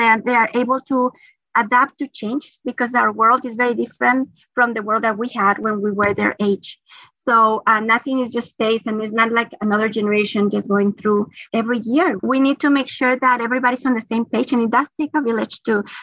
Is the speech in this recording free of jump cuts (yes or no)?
no